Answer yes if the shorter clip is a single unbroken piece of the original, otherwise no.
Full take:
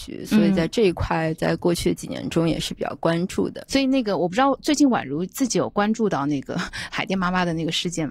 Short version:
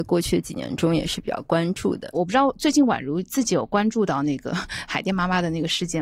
no